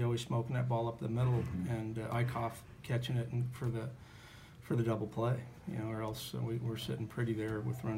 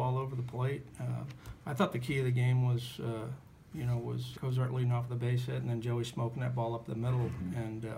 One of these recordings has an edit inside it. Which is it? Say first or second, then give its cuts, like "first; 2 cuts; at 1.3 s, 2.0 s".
second; 2 cuts; at 1.6 s, 4.3 s